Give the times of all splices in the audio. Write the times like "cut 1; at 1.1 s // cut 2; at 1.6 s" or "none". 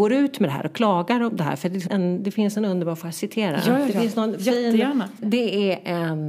cut 1; at 1.9 s // cut 2; at 5.2 s